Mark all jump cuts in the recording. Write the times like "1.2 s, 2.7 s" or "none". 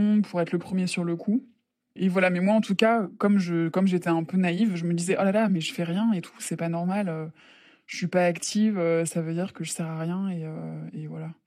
none